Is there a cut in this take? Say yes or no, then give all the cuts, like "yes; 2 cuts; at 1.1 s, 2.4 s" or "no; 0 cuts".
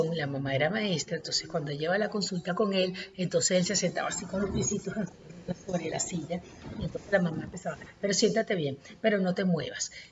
no; 0 cuts